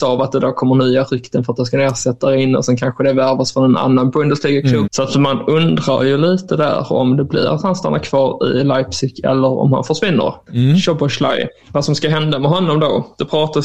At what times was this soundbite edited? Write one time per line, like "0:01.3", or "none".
0:04.8
0:10.5